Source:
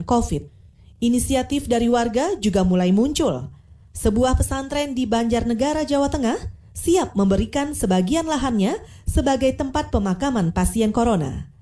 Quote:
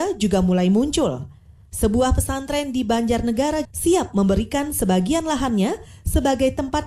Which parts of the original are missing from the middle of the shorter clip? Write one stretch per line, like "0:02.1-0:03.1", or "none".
0:05.9-0:06.7